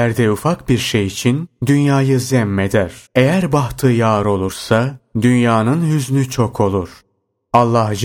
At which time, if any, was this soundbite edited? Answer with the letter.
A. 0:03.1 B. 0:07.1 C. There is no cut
A